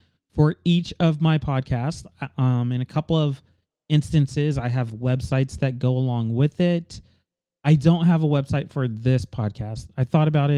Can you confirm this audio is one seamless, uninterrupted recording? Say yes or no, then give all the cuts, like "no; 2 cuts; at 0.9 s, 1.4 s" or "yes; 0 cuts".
yes; 0 cuts